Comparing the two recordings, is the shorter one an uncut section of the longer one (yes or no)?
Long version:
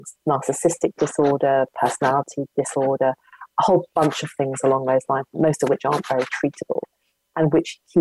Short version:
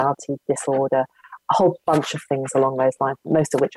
yes